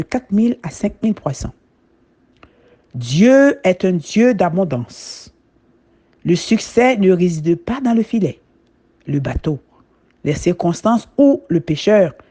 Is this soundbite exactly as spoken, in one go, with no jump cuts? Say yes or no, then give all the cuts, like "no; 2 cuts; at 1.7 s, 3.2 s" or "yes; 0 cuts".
yes; 0 cuts